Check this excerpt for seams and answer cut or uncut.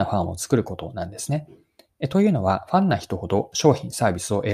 uncut